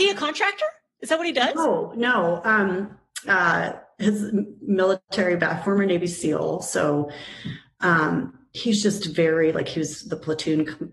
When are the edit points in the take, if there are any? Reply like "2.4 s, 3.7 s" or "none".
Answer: 3.2 s